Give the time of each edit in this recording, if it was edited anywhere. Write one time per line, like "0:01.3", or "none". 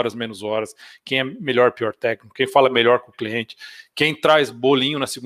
none